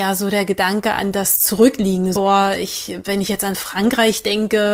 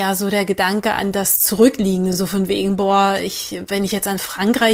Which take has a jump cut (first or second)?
first